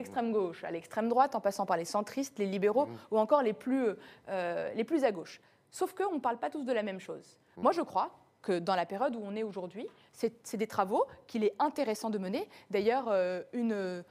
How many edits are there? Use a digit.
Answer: 0